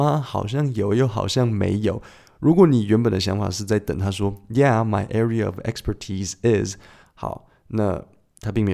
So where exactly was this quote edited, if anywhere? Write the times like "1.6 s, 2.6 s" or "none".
none